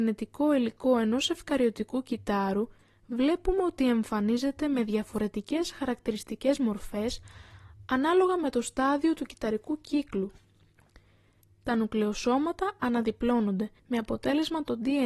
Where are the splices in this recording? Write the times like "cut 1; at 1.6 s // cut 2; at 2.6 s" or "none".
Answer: cut 1; at 11.4 s // cut 2; at 13.8 s